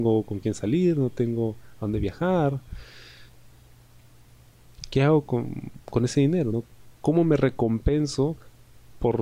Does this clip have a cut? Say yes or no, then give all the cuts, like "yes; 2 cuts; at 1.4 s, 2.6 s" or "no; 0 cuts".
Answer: no; 0 cuts